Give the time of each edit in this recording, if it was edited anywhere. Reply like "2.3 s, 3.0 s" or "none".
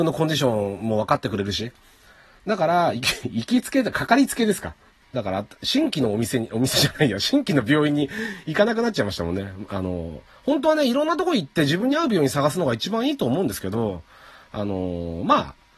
5.0 s